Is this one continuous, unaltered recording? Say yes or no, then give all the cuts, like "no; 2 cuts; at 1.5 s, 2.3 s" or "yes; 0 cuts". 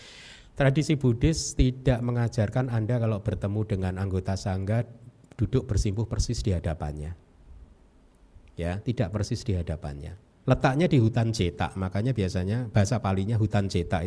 no; 2 cuts; at 8.8 s, 10.4 s